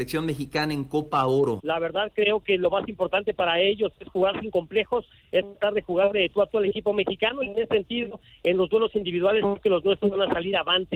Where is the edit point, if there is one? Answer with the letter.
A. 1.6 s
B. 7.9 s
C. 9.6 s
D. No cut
A